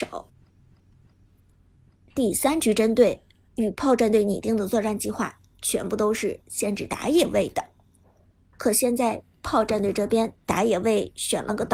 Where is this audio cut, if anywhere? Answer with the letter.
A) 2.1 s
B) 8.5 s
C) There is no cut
A